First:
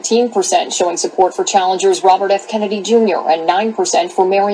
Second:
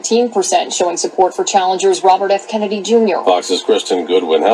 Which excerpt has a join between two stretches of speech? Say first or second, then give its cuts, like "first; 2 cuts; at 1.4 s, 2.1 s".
second; 1 cut; at 3.2 s